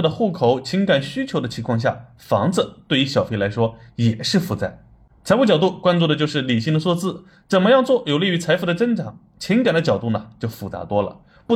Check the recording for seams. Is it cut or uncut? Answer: cut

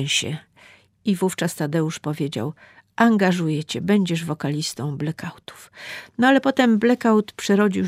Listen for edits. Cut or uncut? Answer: uncut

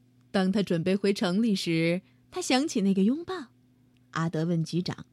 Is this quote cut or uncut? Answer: cut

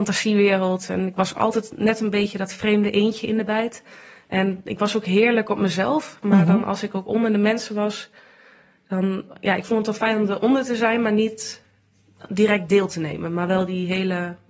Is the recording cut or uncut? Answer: uncut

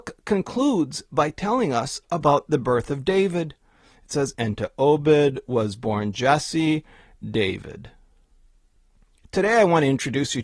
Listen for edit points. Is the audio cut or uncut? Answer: cut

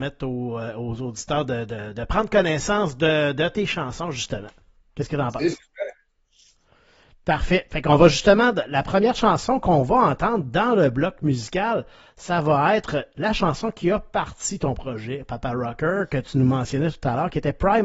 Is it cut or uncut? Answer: uncut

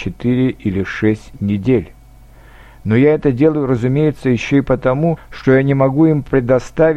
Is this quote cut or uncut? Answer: cut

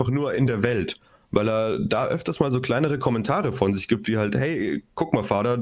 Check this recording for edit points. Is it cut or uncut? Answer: uncut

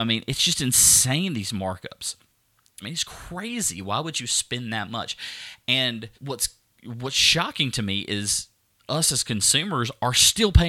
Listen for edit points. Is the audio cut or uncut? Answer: cut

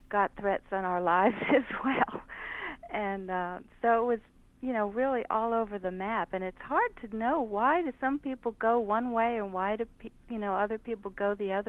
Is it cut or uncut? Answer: uncut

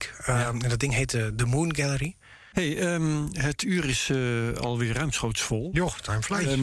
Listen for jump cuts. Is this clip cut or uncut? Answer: cut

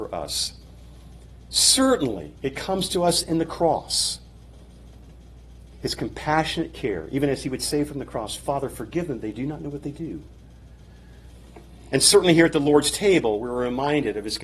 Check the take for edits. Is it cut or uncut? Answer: uncut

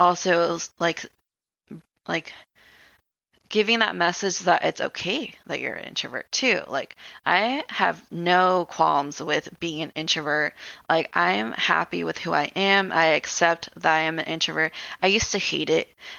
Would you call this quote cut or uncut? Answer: uncut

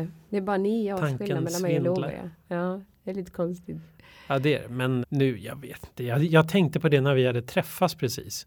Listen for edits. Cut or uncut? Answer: cut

